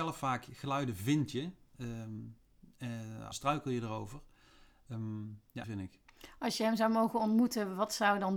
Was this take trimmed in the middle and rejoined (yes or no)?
yes